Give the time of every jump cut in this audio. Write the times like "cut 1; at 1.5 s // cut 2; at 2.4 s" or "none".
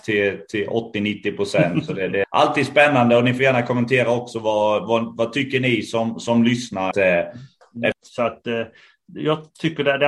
cut 1; at 2.2 s // cut 2; at 6.9 s // cut 3; at 7.9 s